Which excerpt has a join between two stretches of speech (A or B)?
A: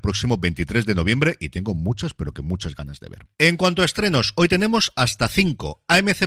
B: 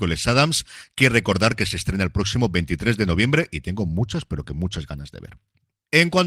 A